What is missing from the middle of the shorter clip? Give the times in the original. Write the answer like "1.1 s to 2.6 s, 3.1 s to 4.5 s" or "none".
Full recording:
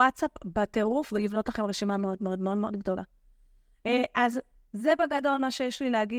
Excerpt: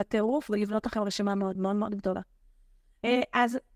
2.2 s to 2.4 s